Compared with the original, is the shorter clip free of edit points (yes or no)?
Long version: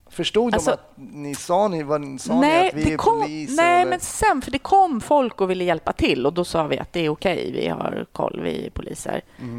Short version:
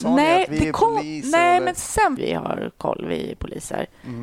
no